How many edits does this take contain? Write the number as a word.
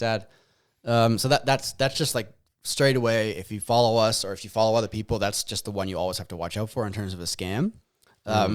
zero